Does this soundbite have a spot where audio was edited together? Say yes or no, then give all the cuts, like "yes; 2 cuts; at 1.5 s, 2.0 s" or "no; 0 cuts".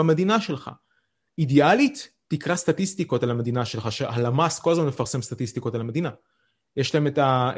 no; 0 cuts